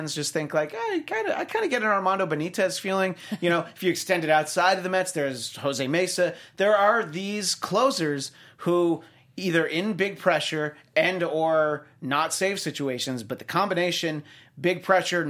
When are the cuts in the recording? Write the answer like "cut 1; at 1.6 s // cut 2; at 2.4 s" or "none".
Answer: none